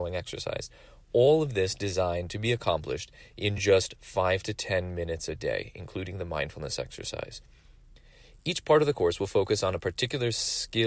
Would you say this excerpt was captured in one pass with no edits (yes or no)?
yes